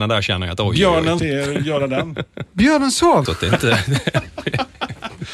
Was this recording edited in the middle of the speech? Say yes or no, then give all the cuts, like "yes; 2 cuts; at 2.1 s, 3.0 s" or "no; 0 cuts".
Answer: yes; 2 cuts; at 1.2 s, 3.3 s